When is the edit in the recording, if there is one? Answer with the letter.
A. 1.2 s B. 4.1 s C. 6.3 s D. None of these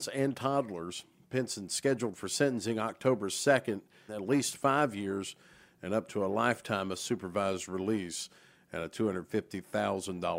B